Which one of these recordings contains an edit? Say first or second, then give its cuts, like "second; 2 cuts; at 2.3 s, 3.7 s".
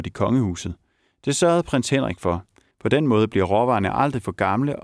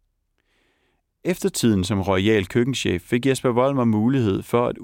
first; 1 cut; at 2.7 s